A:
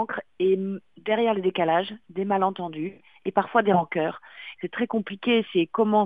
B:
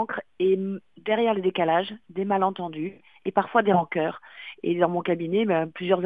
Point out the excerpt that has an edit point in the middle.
A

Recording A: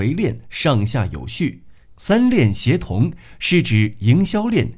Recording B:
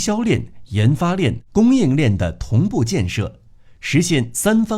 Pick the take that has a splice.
A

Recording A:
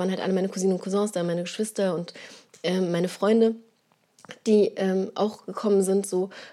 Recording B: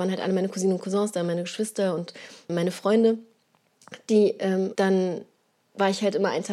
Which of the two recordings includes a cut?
B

